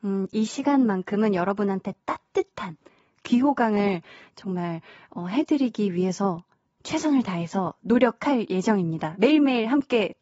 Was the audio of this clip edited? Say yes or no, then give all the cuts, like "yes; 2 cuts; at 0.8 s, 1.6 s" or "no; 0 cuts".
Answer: no; 0 cuts